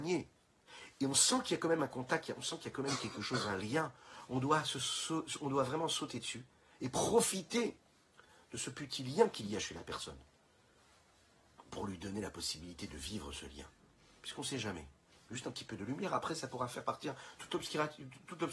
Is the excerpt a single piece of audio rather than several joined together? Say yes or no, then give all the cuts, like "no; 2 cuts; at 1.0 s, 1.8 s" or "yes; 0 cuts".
yes; 0 cuts